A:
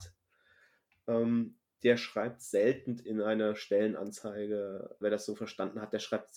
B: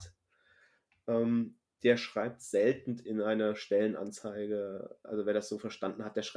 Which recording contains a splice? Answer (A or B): A